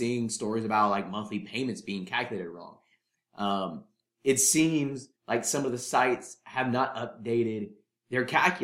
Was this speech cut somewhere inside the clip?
yes; 1 cut; at 5.2 s

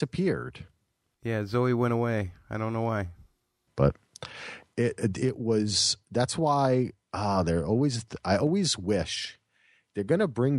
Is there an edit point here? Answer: no; 0 cuts

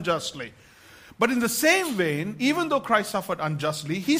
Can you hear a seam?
no; 0 cuts

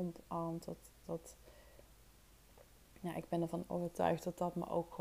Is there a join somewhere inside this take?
no; 0 cuts

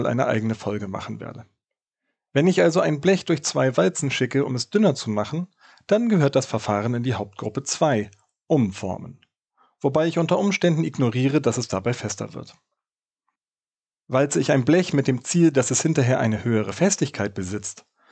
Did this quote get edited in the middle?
no; 0 cuts

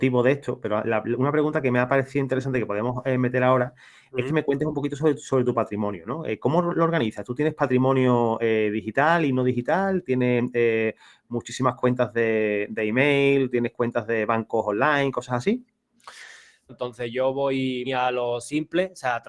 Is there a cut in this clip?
yes; 2 cuts; at 16.7 s, 17.9 s

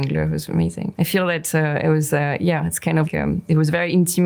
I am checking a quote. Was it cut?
yes; 2 cuts; at 0.9 s, 3.0 s

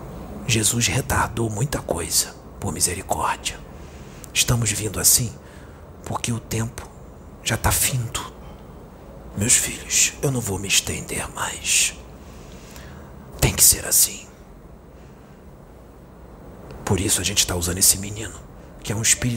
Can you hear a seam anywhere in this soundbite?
yes; 2 cuts; at 9.3 s, 13.3 s

